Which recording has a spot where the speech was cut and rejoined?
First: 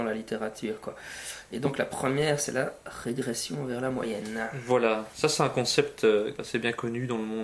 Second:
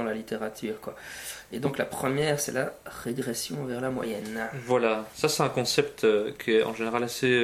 first; 1 cut; at 6.4 s

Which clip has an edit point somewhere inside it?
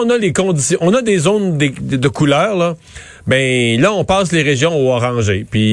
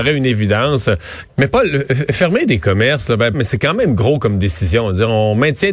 second; 2 cuts; at 1.3 s, 3.3 s

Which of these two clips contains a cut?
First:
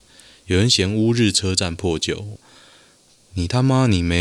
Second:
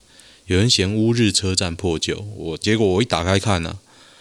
first; 1 cut; at 2.4 s

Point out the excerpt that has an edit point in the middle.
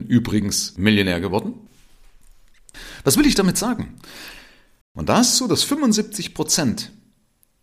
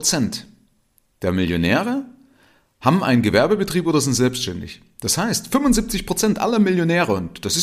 first; 1 cut; at 4.8 s

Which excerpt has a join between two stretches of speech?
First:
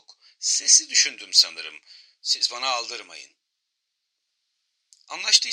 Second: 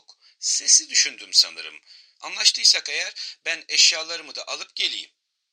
second; 1 cut; at 2.1 s

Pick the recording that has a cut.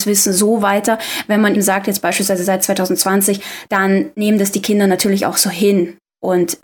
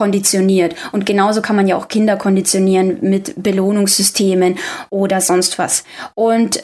first; 2 cuts; at 1.5 s, 3.6 s

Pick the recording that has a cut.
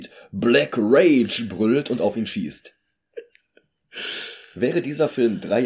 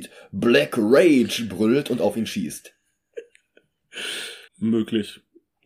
second; 1 cut; at 4.5 s

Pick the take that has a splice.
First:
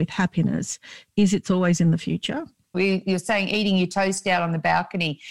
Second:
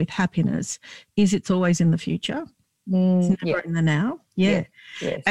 first; 1 cut; at 2.7 s

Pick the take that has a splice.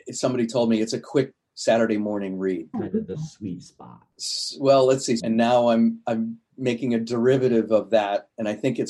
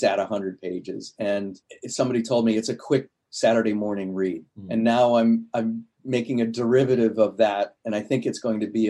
first; 2 cuts; at 2.7 s, 5.2 s

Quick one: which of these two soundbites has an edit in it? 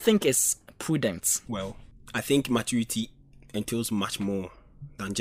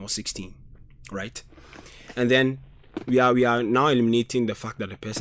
first; 1 cut; at 1.5 s

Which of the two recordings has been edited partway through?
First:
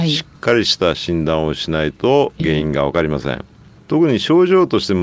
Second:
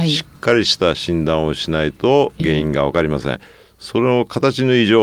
second; 1 cut; at 3.4 s

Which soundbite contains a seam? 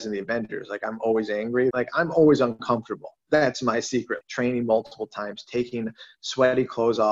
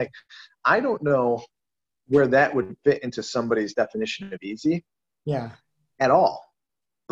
first; 2 cuts; at 1.7 s, 4.2 s

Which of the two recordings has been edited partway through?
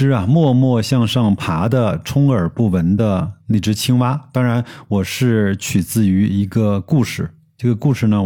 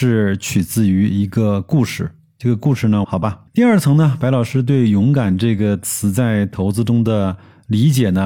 second; 1 cut; at 3.0 s

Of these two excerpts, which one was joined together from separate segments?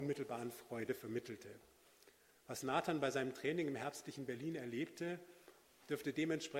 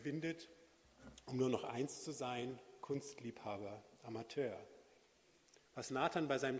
second; 1 cut; at 5.7 s

